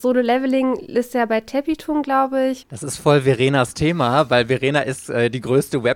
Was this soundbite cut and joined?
yes; 1 cut; at 2.6 s

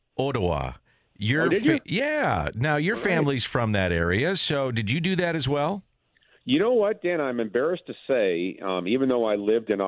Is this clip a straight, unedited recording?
yes; 0 cuts

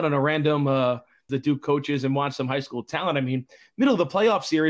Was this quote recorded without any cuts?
no; 1 cut; at 1.3 s

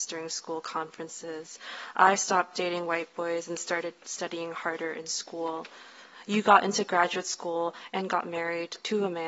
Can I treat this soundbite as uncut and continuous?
yes; 0 cuts

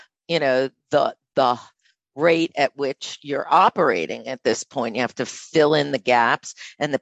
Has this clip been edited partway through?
no; 0 cuts

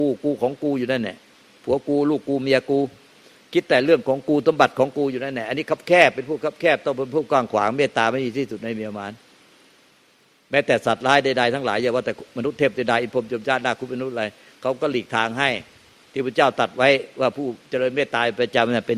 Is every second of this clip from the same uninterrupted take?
yes; 0 cuts

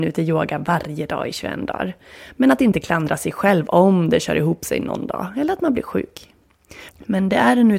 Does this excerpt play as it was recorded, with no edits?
no; 1 cut; at 6.9 s

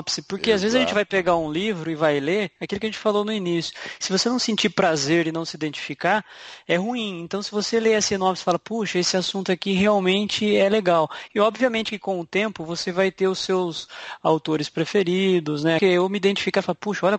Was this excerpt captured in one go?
no; 2 cuts; at 11.3 s, 15.8 s

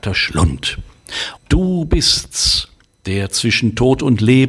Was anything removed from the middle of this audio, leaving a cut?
yes; 1 cut; at 1.4 s

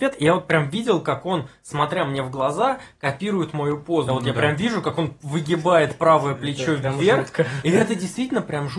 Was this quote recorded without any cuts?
no; 1 cut; at 4.1 s

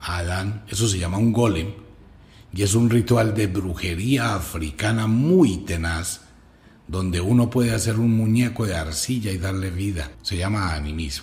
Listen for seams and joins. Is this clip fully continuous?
no; 1 cut; at 10.1 s

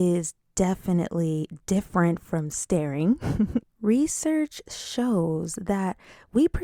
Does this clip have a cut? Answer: yes; 1 cut; at 3.6 s

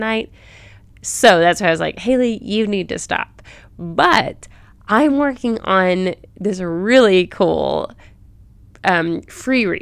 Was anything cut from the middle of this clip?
no; 0 cuts

